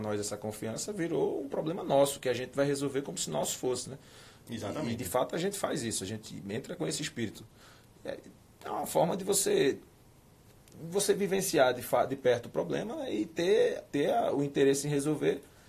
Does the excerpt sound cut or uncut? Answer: uncut